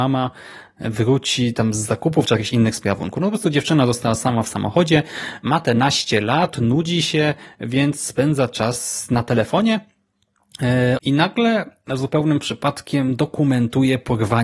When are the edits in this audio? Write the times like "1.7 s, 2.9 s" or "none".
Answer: 11.0 s